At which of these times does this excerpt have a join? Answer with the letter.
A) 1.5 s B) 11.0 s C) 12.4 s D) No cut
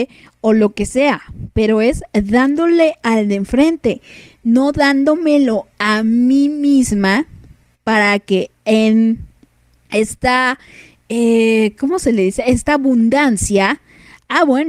D